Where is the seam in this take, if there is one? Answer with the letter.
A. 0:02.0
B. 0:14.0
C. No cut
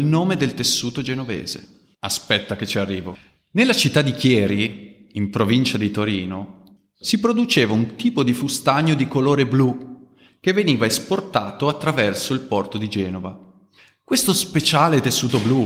A